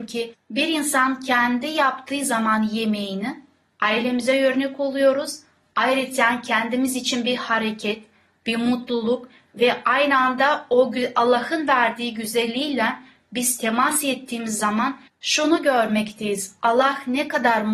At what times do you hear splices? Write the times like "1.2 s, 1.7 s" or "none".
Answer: none